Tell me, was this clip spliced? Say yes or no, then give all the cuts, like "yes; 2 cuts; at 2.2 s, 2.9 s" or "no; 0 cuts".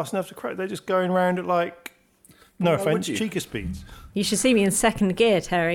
no; 0 cuts